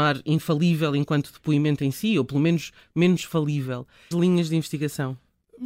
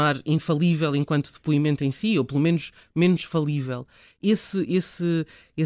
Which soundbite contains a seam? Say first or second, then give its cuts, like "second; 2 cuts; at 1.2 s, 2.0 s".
first; 1 cut; at 4.1 s